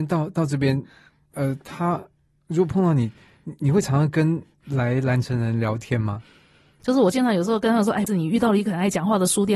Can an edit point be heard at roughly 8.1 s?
yes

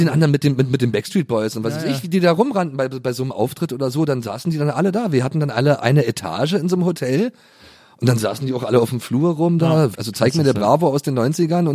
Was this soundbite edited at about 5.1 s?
no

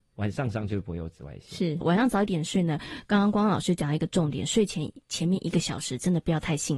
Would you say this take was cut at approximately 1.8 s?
yes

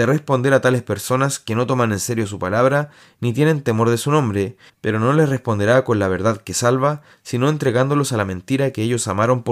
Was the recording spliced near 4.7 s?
yes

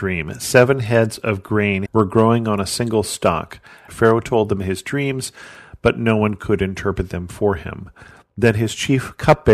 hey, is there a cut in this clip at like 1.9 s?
yes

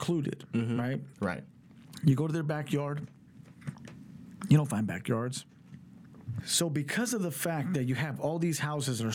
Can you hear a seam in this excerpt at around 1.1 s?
yes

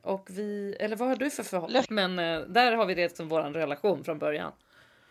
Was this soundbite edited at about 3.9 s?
no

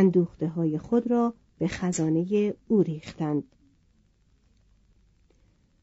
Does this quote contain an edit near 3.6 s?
no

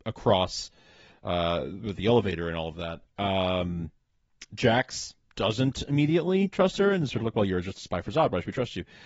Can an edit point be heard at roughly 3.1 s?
yes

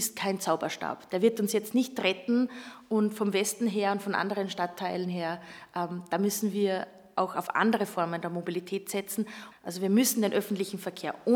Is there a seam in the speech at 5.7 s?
no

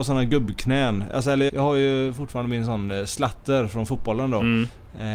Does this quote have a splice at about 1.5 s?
yes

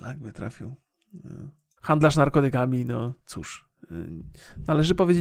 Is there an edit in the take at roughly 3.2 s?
yes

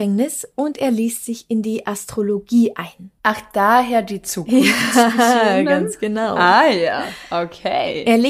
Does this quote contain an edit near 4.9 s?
no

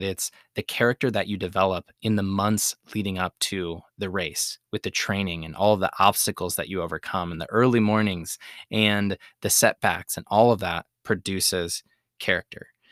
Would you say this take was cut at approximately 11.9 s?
no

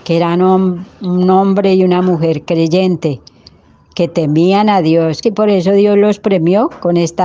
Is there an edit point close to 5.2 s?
yes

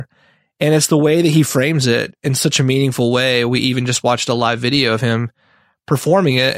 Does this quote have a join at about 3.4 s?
no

